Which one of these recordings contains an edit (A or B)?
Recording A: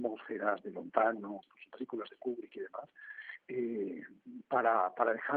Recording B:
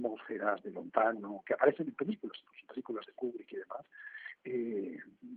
A